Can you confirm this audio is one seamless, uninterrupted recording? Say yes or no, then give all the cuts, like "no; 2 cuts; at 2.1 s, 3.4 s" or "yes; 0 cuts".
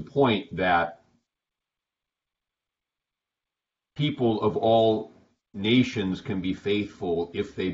yes; 0 cuts